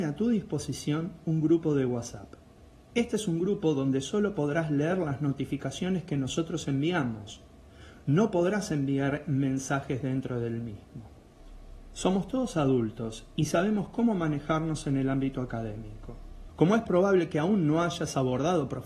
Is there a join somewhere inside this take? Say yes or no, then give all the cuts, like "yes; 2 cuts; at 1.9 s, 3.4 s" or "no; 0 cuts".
yes; 1 cut; at 16.5 s